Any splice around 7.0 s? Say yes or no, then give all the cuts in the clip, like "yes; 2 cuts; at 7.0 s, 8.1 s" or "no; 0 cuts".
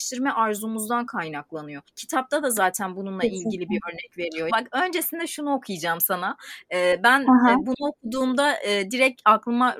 no; 1 cut; at 4.5 s